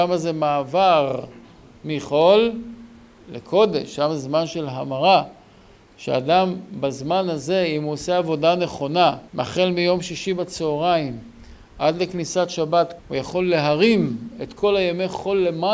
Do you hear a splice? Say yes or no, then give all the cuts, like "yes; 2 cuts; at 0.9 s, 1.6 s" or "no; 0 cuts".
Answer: yes; 2 cuts; at 9.3 s, 13.0 s